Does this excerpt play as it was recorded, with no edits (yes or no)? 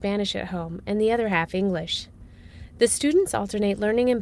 yes